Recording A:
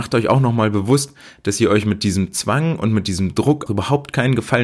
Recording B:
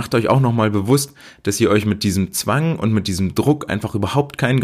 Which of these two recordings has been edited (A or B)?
A